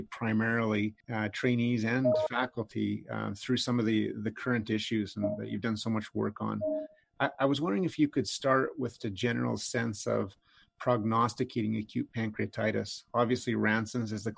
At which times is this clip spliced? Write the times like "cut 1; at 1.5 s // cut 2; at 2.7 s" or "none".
cut 1; at 1.0 s // cut 2; at 9.0 s